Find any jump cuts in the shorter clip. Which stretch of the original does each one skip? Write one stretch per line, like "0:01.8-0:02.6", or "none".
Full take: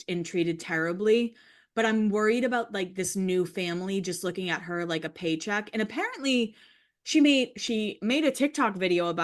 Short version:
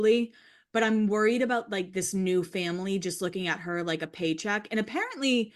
none